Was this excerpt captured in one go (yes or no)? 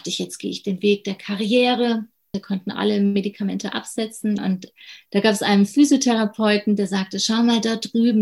no